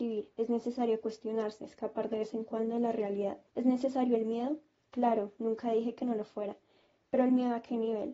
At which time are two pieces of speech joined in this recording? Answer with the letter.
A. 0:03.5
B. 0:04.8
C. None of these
A